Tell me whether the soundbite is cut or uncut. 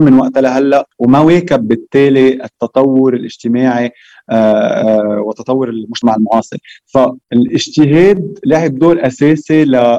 cut